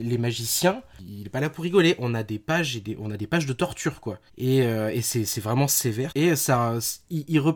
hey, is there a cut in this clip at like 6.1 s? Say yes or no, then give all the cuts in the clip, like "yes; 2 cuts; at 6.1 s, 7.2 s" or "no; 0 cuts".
yes; 2 cuts; at 4.3 s, 6.1 s